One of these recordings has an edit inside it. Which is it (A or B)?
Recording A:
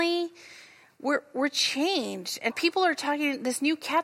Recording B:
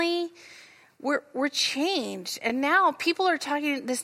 A